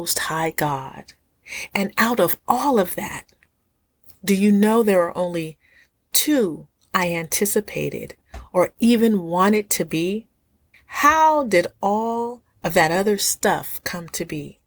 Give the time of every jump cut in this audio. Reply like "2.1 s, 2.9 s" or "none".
10.7 s